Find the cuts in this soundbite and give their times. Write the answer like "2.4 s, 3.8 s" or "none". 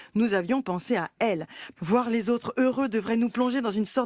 1.8 s